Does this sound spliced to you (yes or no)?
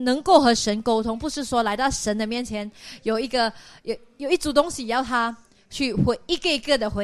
no